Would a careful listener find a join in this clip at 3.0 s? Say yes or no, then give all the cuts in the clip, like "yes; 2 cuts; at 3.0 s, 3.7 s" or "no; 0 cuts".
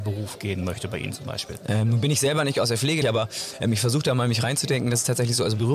yes; 2 cuts; at 1.6 s, 3.0 s